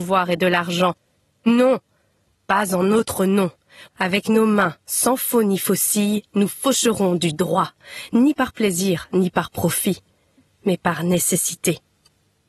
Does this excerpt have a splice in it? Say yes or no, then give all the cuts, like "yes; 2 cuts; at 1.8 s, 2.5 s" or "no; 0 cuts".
yes; 1 cut; at 3.8 s